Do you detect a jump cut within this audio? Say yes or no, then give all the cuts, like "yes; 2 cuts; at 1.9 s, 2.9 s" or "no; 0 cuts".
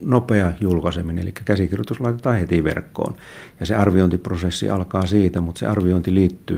no; 0 cuts